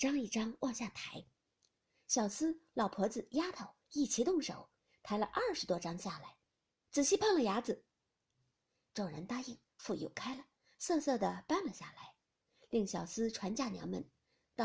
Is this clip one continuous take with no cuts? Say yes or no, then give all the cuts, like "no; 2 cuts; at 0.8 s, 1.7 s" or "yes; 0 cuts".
no; 2 cuts; at 6.8 s, 8.5 s